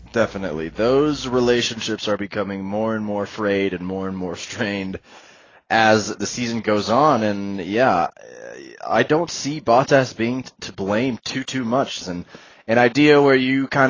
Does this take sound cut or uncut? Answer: cut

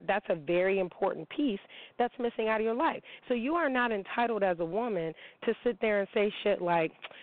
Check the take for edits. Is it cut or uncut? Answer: uncut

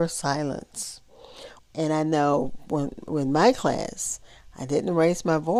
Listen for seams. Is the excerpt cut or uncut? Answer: cut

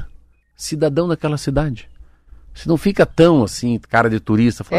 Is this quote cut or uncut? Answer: uncut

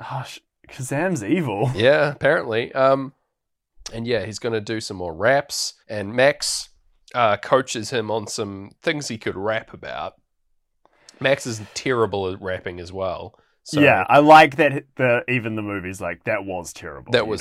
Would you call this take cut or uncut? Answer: cut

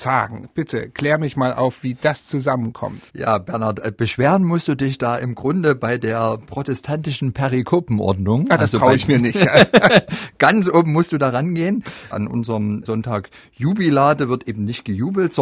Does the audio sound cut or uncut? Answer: cut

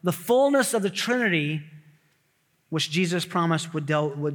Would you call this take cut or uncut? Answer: uncut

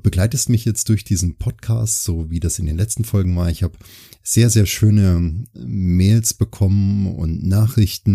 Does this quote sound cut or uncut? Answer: uncut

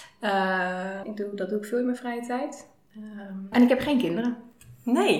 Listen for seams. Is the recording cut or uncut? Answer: cut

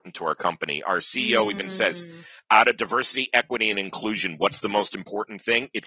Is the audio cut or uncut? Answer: uncut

